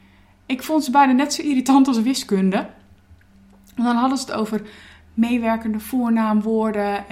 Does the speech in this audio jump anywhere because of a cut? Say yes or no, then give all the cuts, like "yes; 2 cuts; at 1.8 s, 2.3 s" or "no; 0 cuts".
no; 0 cuts